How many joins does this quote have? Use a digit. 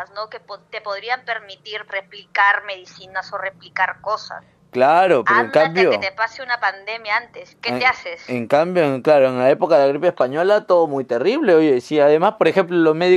1